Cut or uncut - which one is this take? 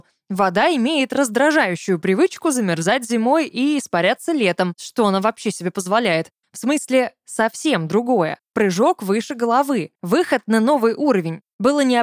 cut